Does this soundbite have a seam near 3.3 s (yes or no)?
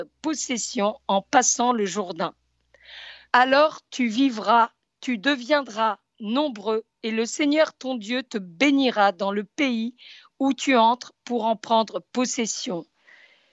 yes